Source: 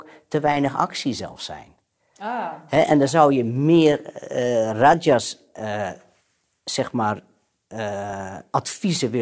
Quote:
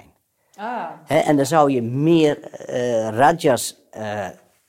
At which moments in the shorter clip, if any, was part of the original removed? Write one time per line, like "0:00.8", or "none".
none